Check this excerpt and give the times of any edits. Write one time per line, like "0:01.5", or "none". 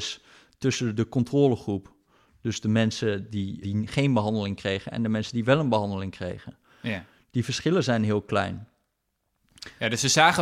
0:03.6